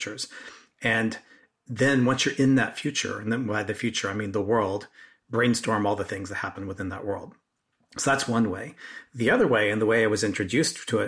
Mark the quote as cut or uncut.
uncut